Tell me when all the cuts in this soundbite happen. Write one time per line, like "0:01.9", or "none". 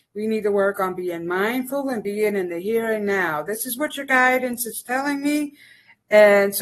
none